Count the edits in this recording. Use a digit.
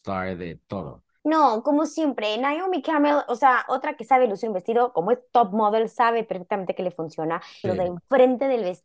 2